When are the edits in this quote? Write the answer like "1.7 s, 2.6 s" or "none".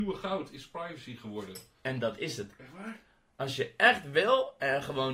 1.8 s